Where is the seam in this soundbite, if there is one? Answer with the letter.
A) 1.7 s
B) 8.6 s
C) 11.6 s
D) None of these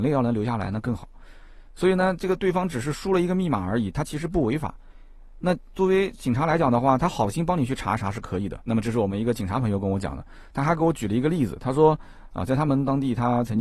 B